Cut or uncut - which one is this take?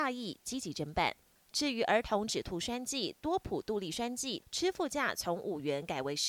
cut